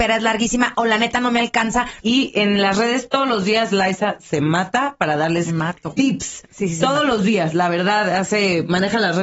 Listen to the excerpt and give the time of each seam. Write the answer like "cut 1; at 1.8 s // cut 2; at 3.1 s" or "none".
cut 1; at 2.0 s